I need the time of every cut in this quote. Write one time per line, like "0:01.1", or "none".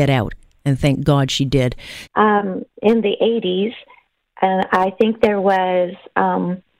0:02.1